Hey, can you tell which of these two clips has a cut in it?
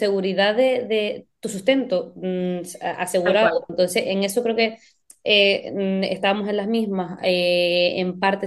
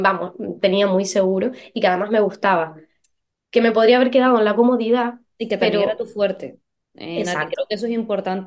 first; 1 cut; at 3.7 s

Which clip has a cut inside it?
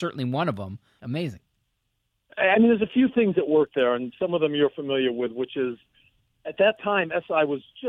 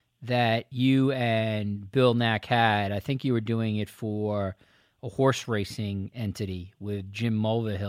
first; 1 cut; at 1.0 s

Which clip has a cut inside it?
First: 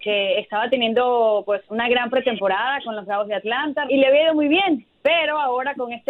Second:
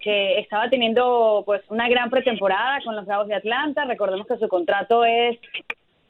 first; 1 cut; at 3.9 s

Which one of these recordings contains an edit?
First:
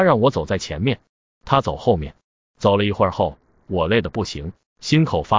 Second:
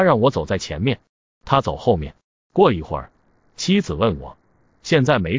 second; 1 cut; at 2.4 s

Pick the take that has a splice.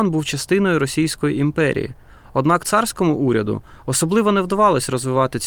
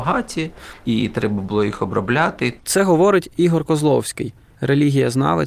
second; 1 cut; at 4.5 s

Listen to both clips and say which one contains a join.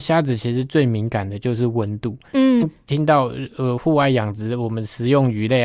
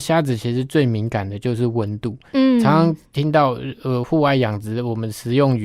first; 1 cut; at 2.6 s

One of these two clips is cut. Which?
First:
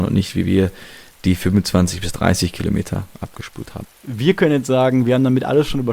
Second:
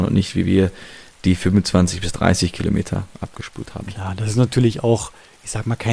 first; 1 cut; at 3.8 s

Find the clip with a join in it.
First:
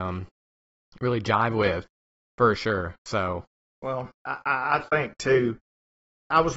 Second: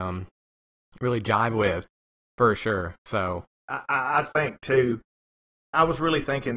second; 1 cut; at 3.6 s

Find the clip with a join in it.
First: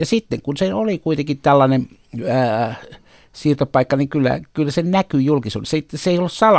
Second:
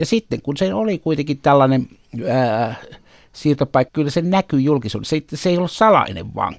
second; 1 cut; at 3.9 s

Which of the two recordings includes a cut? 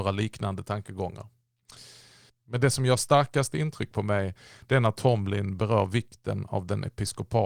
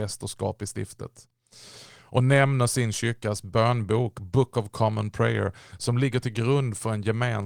first; 1 cut; at 2.3 s

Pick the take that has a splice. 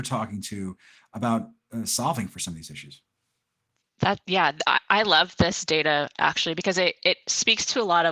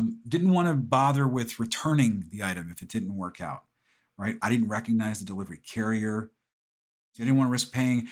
second; 1 cut; at 4.4 s

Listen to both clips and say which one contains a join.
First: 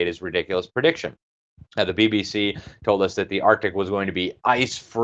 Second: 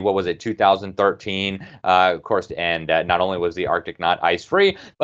second; 1 cut; at 2.5 s

